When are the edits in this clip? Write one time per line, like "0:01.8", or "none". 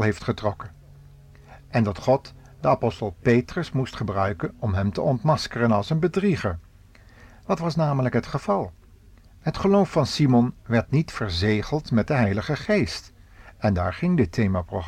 none